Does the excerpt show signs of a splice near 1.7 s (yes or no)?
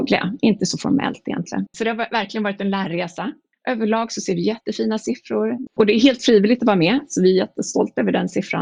yes